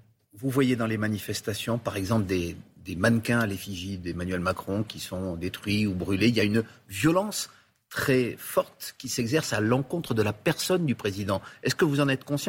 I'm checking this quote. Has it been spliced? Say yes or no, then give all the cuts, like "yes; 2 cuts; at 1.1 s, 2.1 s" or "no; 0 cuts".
no; 0 cuts